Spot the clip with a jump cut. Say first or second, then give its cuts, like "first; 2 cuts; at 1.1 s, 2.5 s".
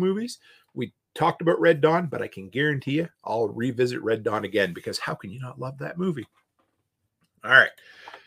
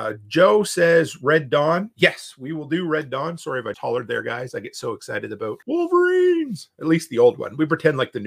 second; 2 cuts; at 3.7 s, 5.6 s